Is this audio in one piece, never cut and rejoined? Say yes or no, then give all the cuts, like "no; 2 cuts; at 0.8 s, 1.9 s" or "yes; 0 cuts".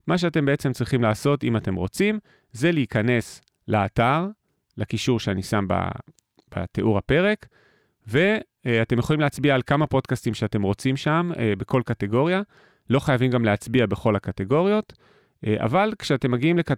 yes; 0 cuts